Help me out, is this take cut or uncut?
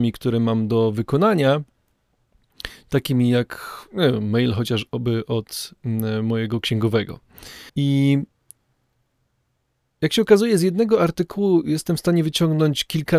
cut